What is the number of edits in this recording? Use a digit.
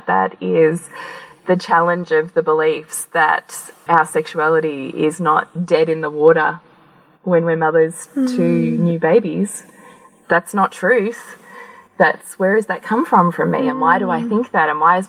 1